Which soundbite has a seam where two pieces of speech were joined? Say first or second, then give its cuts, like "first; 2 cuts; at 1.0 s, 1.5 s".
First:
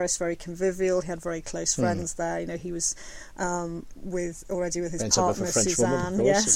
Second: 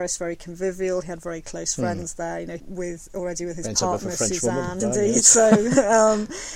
second; 2 cuts; at 2.6 s, 4.8 s